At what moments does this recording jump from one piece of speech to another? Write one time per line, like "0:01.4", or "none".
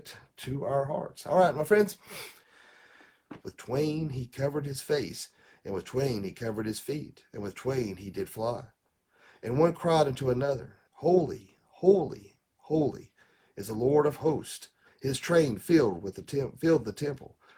0:03.4
0:10.9
0:14.8